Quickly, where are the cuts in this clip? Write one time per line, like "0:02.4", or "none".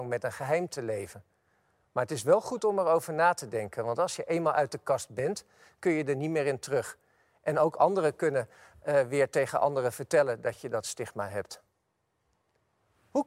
none